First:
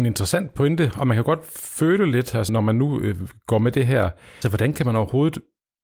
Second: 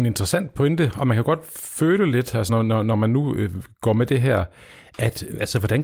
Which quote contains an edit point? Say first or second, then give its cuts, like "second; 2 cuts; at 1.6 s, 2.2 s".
first; 2 cuts; at 2.5 s, 4.4 s